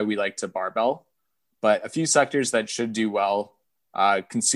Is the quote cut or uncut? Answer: uncut